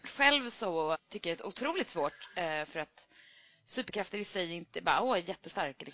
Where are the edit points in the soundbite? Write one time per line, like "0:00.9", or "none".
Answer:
0:00.9